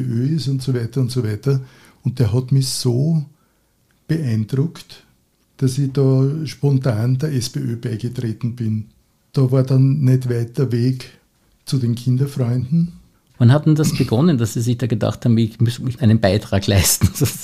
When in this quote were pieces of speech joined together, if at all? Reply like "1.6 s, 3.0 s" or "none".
13.3 s, 16.0 s